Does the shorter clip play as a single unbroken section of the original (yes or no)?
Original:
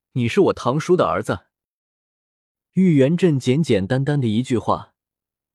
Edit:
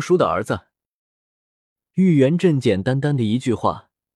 no